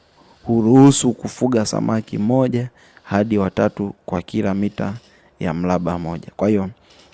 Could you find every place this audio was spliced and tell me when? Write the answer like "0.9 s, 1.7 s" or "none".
none